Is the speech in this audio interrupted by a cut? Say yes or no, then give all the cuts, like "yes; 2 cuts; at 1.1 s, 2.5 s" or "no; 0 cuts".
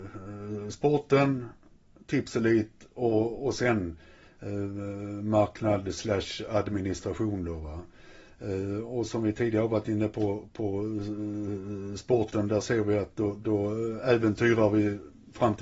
no; 0 cuts